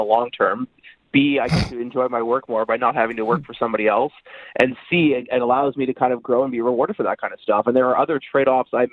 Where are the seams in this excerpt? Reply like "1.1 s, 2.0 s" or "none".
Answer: none